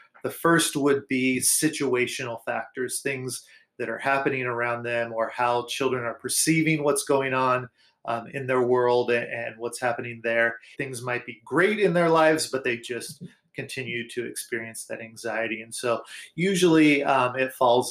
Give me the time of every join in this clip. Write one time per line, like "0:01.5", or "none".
0:10.7